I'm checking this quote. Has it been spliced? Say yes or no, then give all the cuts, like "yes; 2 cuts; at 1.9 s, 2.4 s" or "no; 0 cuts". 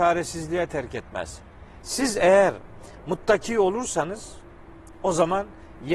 yes; 1 cut; at 1.8 s